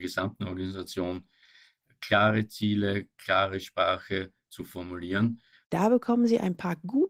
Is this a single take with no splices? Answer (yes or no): no